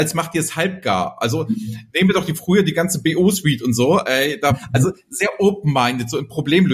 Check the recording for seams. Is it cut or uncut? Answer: cut